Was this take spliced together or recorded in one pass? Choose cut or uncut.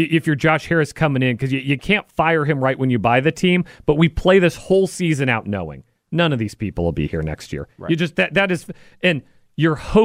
uncut